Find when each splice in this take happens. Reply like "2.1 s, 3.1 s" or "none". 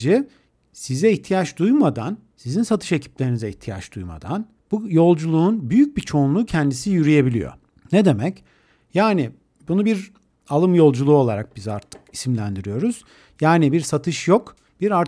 none